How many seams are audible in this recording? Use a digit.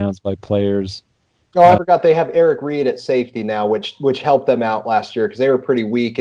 1